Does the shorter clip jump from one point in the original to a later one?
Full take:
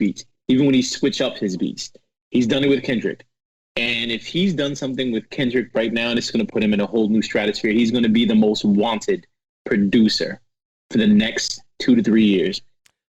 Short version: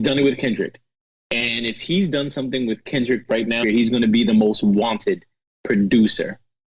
yes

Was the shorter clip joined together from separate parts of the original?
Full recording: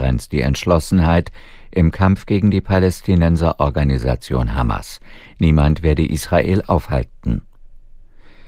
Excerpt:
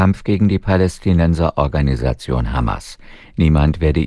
no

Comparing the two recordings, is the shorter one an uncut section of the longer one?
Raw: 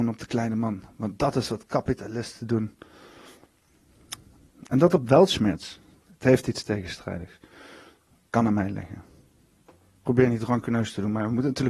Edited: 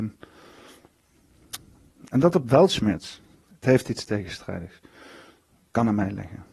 yes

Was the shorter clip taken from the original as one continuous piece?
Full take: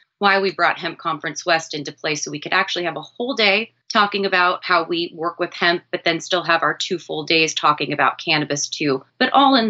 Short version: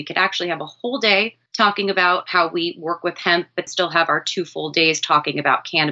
no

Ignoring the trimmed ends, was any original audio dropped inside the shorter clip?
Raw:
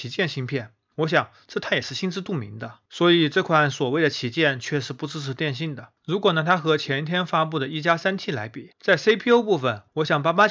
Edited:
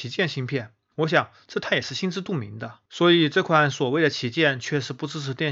no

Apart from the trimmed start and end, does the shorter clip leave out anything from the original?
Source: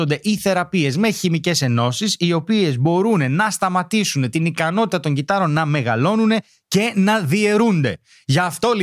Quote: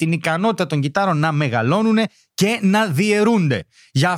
no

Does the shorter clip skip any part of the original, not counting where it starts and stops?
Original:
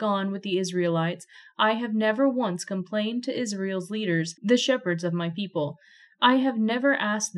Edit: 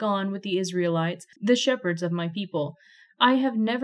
yes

